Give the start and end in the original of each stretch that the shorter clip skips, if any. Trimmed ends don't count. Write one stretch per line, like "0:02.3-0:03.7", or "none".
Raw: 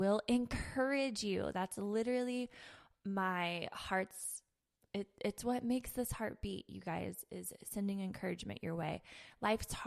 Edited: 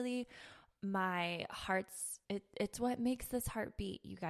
0:04.5-0:04.9